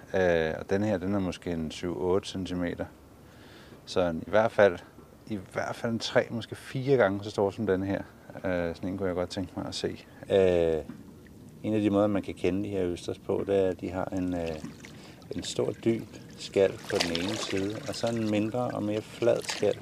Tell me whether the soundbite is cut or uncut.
cut